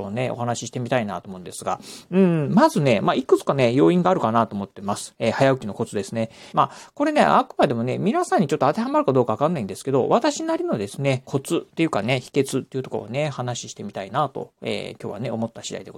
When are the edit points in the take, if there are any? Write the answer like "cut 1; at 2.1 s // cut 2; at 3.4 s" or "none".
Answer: cut 1; at 6.5 s // cut 2; at 11.3 s